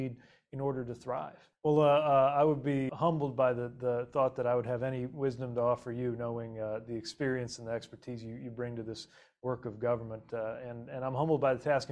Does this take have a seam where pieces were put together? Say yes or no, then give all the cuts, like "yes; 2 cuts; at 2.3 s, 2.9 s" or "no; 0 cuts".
yes; 2 cuts; at 1.5 s, 2.9 s